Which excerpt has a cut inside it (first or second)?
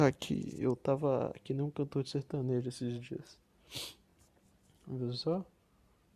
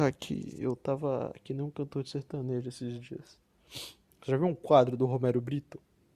second